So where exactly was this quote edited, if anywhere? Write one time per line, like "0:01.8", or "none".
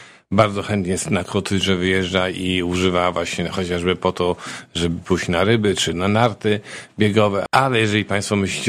0:05.9
0:07.5